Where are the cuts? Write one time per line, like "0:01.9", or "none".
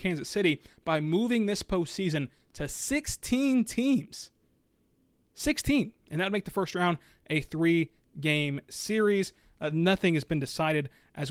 0:09.7